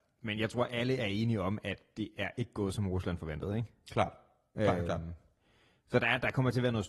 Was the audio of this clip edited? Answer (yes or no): no